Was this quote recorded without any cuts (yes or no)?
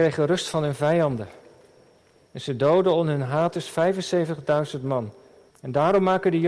no